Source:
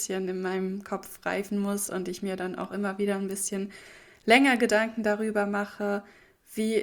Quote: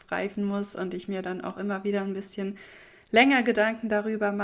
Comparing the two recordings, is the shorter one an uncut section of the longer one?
yes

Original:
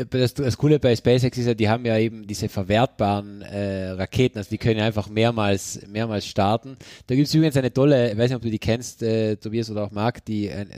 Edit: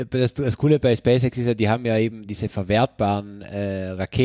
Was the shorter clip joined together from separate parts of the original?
no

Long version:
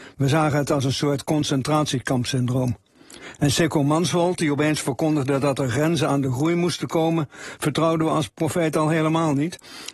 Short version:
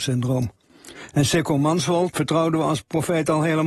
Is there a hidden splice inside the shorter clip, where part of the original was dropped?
yes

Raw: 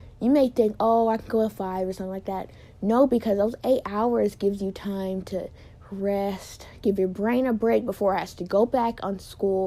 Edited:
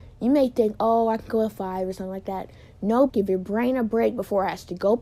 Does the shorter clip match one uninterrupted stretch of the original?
no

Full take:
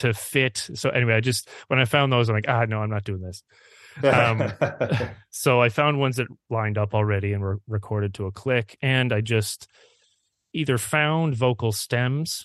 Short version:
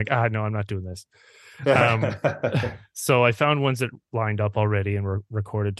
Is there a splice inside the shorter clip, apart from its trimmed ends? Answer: no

